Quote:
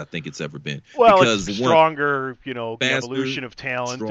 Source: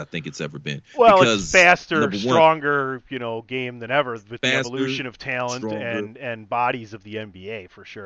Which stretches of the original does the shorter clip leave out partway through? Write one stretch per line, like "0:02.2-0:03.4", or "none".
0:01.4-0:02.1
0:03.4-0:04.4